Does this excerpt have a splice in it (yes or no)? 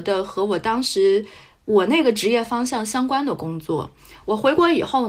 no